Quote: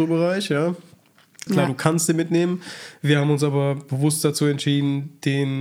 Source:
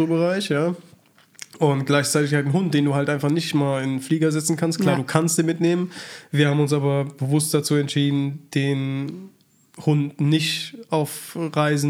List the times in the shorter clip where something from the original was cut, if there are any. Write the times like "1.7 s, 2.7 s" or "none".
1.5 s